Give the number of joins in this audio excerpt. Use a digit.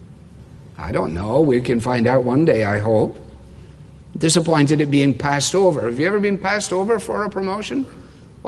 0